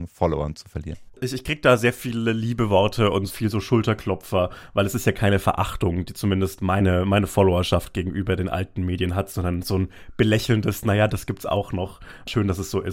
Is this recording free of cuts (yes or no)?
no